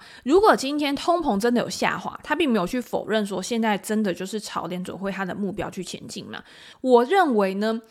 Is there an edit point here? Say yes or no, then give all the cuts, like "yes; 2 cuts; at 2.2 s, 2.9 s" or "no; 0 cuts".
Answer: yes; 1 cut; at 6.7 s